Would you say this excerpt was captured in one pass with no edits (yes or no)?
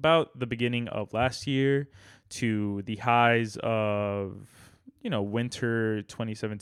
yes